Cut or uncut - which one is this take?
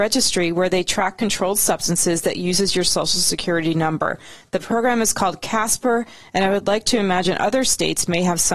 uncut